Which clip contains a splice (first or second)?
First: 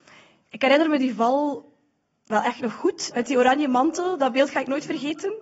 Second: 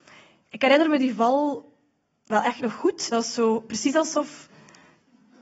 first